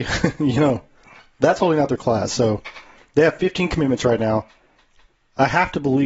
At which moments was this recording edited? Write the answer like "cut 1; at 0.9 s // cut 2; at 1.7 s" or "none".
none

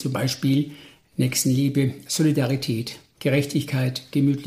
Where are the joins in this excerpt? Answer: cut 1; at 2.1 s

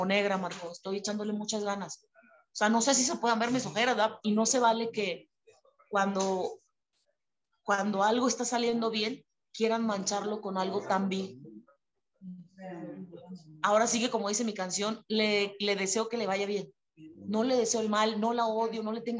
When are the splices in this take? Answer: cut 1; at 4.2 s

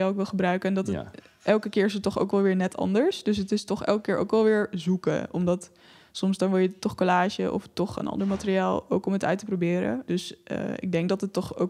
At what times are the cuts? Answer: cut 1; at 10.1 s

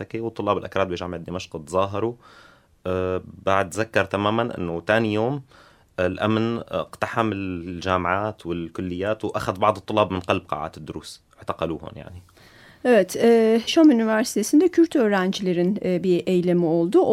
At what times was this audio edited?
cut 1; at 13.7 s

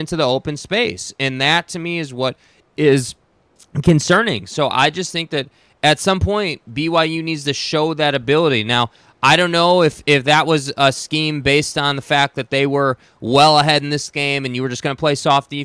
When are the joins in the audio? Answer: none

